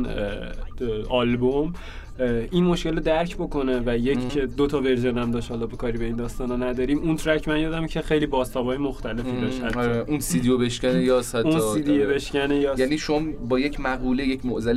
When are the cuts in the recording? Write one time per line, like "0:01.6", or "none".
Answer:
0:04.3